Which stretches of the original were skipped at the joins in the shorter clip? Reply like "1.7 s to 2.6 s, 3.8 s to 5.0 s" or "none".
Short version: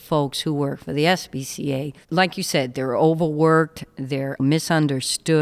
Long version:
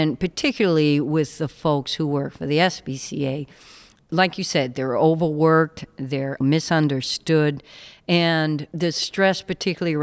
3.5 s to 4.0 s

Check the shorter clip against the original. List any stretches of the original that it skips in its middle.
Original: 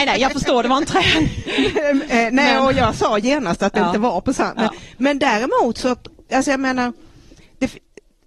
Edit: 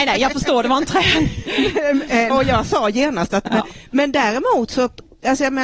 2.3 s to 2.6 s, 3.8 s to 4.5 s

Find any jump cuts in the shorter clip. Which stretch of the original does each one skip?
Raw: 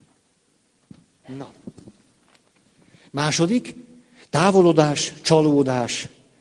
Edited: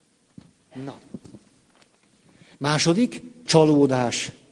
4.0 s to 5.2 s

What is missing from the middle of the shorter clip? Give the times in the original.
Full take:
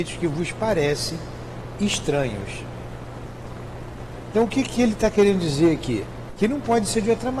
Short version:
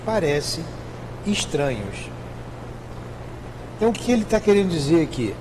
4.5 s to 4.6 s

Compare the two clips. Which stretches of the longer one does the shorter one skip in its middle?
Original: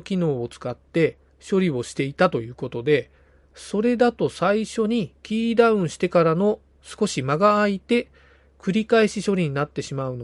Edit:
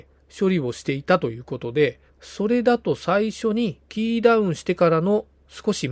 3.2 s to 3.4 s

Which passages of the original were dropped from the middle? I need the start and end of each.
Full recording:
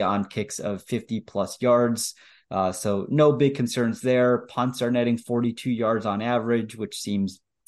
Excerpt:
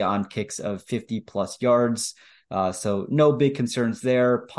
none

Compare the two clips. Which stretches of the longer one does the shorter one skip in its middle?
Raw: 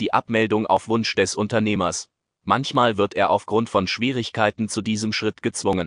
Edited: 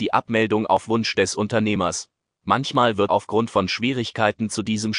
3.1 s to 3.3 s

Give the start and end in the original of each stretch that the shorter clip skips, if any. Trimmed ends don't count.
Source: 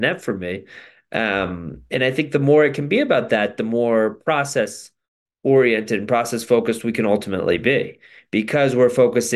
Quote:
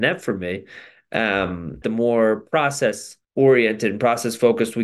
1.8 s to 3.6 s, 5.0 s to 5.3 s

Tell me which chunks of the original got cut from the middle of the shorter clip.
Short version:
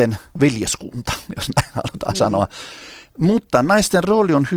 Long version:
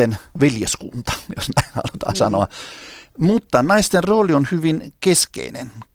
none

